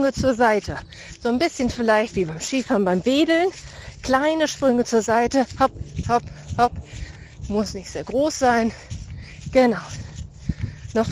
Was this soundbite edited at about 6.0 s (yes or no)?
yes